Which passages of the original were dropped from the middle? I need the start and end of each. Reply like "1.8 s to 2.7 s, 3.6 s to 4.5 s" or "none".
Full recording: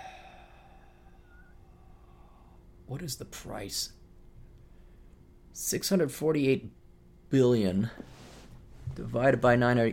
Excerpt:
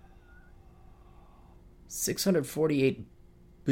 2.8 s to 5.4 s